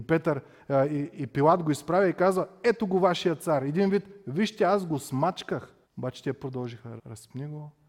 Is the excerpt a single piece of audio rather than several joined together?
no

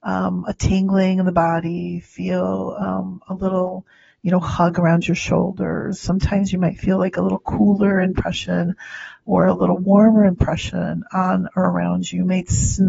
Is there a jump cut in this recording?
no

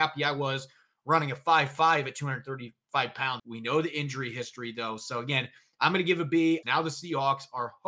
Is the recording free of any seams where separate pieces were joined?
no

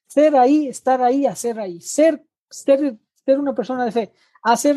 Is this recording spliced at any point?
no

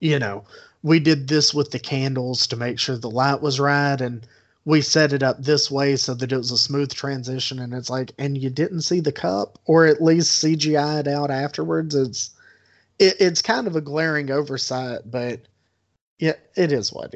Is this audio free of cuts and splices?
yes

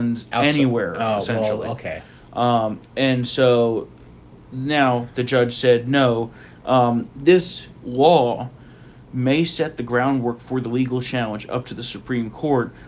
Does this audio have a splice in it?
yes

